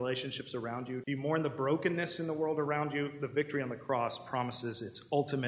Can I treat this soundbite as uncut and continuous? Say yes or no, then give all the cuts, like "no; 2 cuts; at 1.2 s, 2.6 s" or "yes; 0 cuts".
no; 1 cut; at 1.0 s